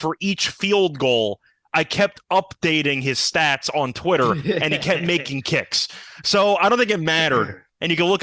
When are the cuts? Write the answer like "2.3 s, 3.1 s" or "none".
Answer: none